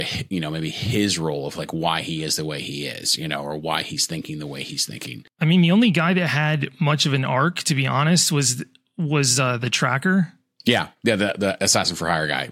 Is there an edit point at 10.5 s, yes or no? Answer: no